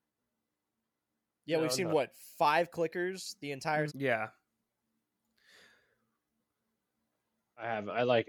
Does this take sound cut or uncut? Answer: cut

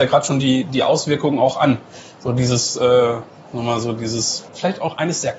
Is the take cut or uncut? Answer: cut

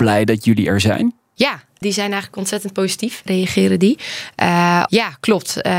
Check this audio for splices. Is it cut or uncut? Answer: cut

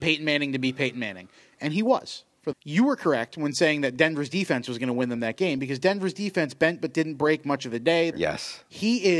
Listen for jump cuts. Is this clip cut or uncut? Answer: cut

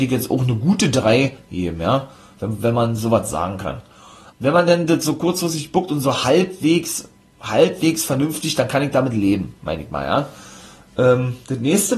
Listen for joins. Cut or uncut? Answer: cut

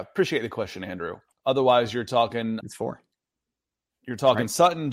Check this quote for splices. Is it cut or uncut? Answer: cut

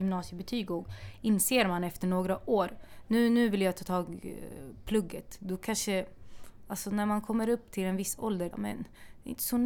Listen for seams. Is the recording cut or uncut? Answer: cut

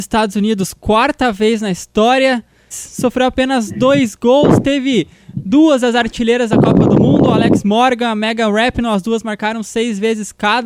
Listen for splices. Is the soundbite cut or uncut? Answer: cut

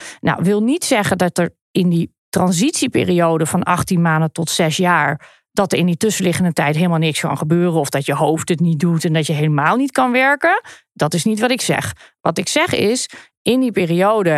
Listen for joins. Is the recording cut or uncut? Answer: uncut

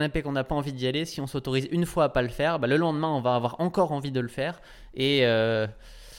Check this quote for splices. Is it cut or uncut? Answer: uncut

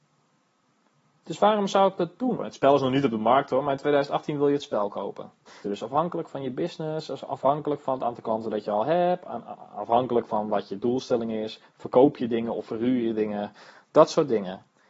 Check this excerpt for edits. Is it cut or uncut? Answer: cut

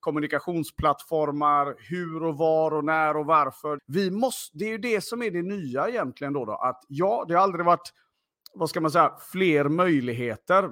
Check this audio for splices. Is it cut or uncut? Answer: cut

